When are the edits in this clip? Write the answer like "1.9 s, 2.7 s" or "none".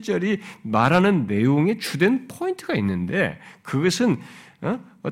none